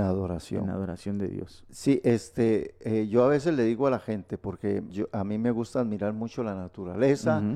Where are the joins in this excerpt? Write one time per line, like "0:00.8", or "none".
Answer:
0:04.9